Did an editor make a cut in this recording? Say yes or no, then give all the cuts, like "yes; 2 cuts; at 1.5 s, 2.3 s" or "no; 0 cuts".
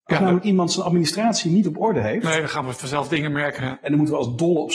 yes; 1 cut; at 3.6 s